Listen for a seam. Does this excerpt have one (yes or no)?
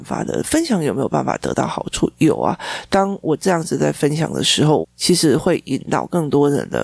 yes